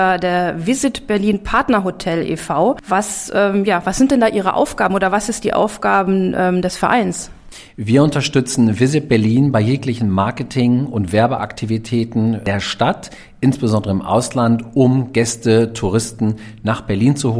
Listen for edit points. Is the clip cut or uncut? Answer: uncut